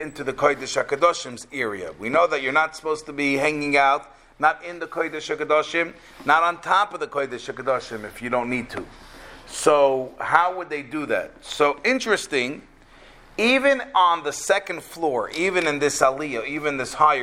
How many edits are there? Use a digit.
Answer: 0